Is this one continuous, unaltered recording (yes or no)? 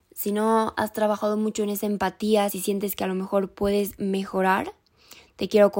yes